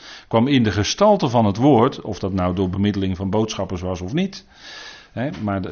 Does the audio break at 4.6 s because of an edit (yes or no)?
no